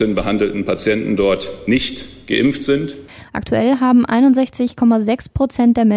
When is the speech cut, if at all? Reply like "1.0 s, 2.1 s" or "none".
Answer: 3.3 s